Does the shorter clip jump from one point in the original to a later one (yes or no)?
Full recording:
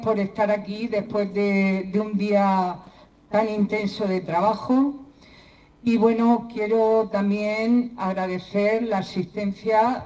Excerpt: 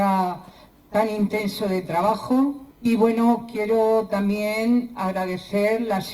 yes